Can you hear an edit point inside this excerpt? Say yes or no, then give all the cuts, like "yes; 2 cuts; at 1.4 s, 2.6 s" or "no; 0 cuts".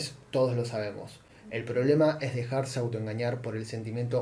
no; 0 cuts